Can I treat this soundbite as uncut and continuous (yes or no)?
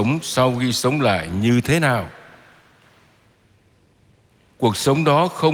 yes